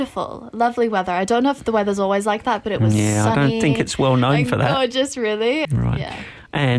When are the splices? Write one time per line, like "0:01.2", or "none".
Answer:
0:05.6